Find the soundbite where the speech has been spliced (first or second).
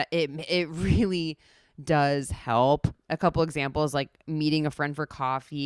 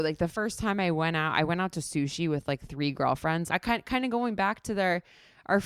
second